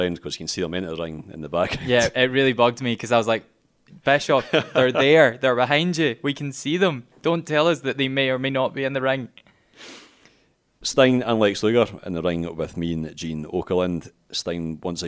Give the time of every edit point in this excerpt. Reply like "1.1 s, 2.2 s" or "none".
none